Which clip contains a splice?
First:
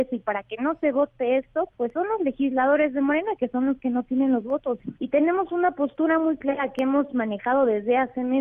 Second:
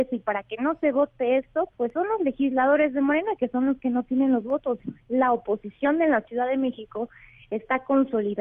first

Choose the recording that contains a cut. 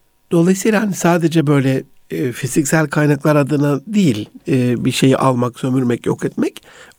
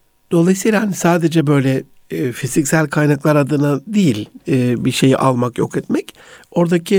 second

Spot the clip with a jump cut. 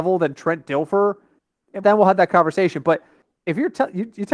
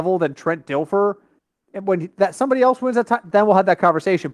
first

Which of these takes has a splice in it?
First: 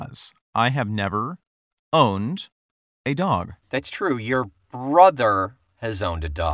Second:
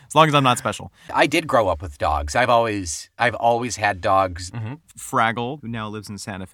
second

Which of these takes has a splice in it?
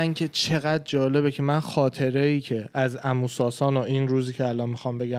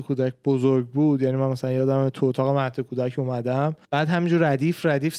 second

